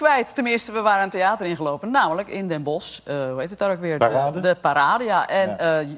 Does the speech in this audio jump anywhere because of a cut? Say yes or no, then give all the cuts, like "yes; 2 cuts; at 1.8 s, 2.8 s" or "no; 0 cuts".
no; 0 cuts